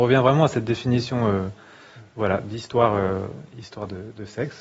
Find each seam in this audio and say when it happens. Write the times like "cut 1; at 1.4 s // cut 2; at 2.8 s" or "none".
none